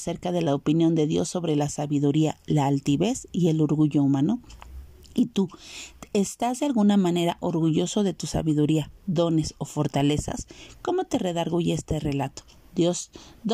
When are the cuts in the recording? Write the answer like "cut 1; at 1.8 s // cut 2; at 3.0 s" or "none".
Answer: none